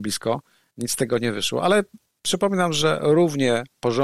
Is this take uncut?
yes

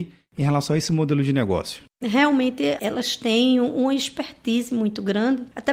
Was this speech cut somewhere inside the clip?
yes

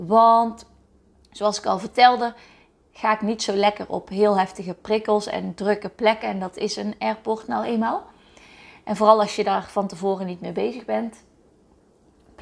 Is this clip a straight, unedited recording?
yes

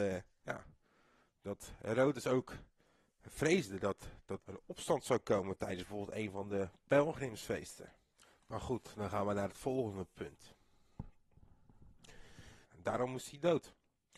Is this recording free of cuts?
no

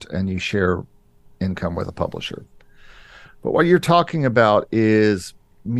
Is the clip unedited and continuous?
yes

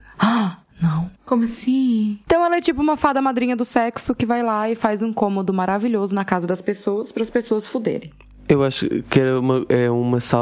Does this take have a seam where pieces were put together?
yes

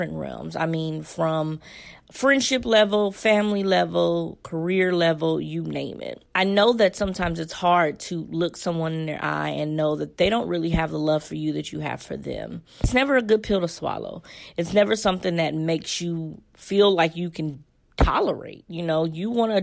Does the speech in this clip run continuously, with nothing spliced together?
yes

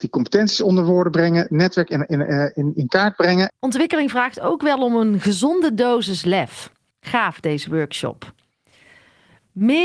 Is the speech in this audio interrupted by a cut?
yes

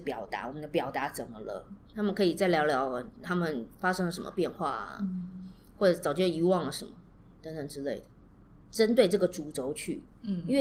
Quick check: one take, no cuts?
no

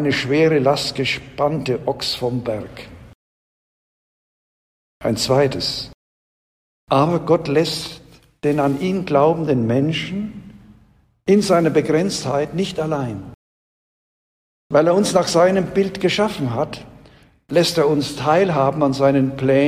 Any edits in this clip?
no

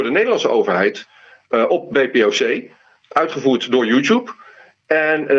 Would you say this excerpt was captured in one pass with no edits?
yes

